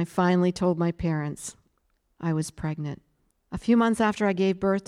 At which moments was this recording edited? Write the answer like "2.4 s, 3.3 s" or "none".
3.3 s

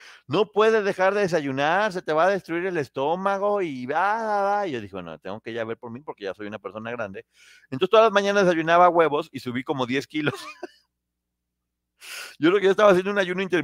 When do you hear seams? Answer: none

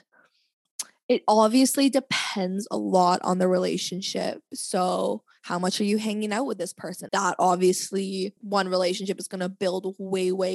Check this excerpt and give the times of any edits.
7.1 s, 8.4 s

